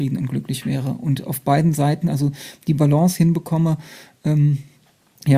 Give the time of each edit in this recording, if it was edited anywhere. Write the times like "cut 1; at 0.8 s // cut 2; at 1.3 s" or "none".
none